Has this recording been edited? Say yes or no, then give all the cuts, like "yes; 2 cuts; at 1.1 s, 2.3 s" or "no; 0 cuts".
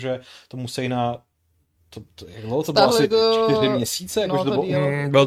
no; 0 cuts